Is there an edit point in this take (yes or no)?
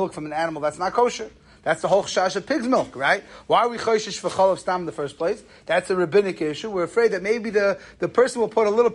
no